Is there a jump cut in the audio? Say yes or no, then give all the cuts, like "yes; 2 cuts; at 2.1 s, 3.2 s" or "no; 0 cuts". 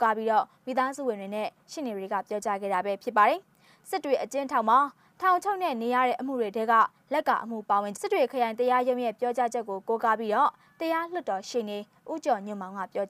yes; 1 cut; at 8.0 s